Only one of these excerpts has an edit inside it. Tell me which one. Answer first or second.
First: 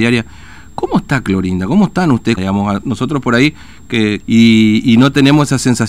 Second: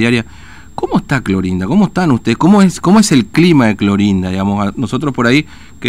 first